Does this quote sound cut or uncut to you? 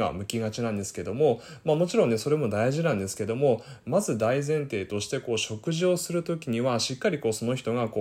uncut